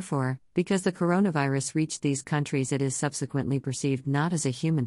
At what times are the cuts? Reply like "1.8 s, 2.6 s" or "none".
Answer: none